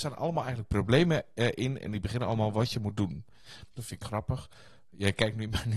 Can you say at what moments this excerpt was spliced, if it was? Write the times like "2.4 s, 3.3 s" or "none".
3.8 s